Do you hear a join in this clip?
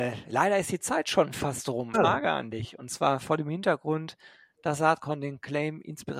yes; 1 cut; at 1.9 s

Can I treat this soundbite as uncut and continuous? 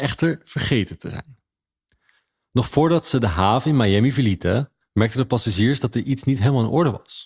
yes; 0 cuts

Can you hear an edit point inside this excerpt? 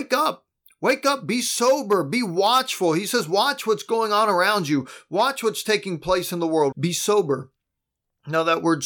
yes; 1 cut; at 6.7 s

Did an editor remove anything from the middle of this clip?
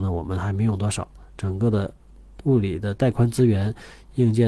no; 0 cuts

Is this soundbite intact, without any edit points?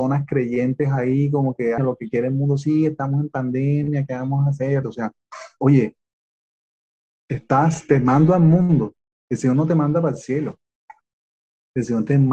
no; 2 cuts; at 1.8 s, 4.8 s

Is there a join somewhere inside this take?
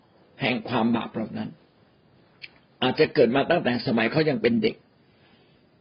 no; 0 cuts

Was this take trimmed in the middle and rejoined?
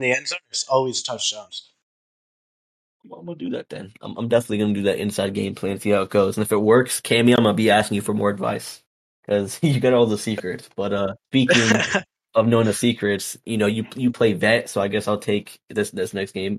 yes; 1 cut; at 11.2 s

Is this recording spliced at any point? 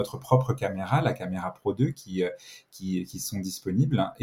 no; 0 cuts

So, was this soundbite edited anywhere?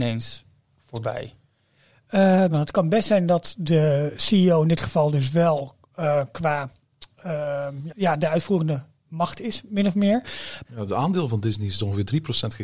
yes; 3 cuts; at 2.5 s, 7.9 s, 10.6 s

